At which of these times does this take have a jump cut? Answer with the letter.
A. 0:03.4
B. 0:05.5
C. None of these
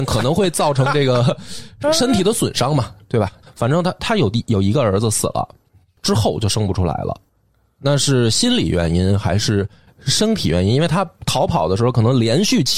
A